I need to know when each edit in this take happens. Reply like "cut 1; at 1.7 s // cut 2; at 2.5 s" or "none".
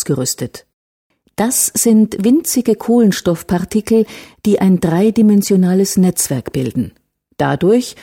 none